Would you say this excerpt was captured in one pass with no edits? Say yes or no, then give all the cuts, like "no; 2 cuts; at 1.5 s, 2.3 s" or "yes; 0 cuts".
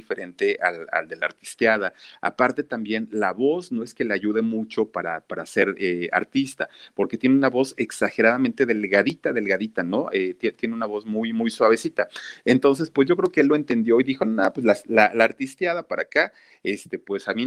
yes; 0 cuts